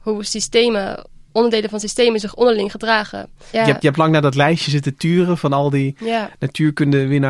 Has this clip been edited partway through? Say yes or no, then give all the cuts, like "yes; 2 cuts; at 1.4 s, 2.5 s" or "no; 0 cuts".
yes; 1 cut; at 3.5 s